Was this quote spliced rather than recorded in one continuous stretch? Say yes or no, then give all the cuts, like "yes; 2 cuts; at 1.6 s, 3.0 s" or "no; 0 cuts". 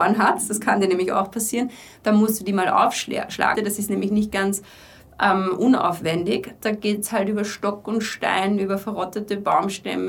yes; 2 cuts; at 3.5 s, 6.6 s